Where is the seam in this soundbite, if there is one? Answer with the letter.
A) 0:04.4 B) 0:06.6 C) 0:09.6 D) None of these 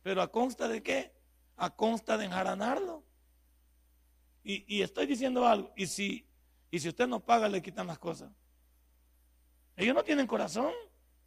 D